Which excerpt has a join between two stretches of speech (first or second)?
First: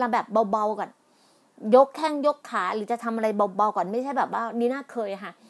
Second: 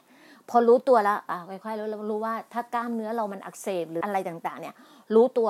second